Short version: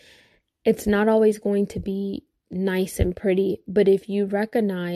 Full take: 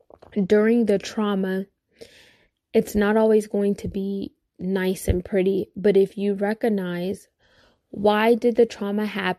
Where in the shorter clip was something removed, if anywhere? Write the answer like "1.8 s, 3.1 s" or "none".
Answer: none